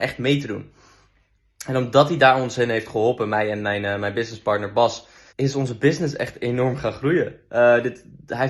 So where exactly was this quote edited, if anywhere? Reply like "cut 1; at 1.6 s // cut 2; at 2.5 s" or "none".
cut 1; at 5.3 s